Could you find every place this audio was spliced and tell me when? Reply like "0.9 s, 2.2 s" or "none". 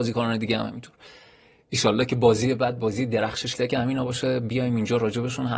3.5 s